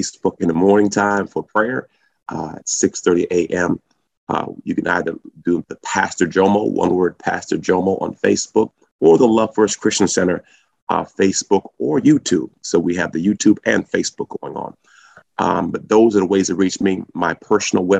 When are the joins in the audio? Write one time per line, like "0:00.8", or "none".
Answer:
none